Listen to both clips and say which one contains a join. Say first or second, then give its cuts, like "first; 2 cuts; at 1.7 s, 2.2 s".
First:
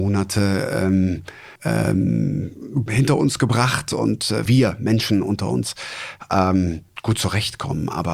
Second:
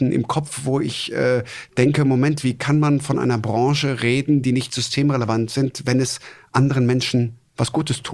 first; 3 cuts; at 1.6 s, 2.9 s, 4.5 s